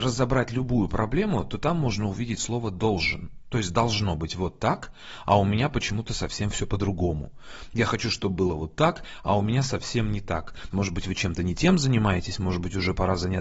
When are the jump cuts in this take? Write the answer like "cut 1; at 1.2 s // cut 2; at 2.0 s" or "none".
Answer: cut 1; at 10.7 s